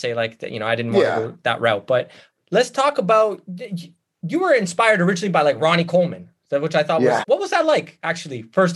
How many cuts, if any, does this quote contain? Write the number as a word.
one